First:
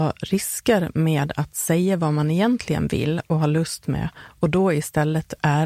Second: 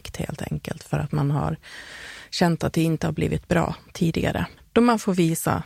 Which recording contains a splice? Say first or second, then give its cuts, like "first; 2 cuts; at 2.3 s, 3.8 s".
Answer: second; 1 cut; at 4.6 s